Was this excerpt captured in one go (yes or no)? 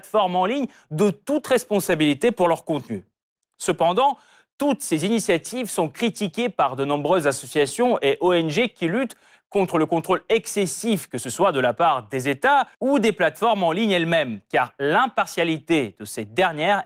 no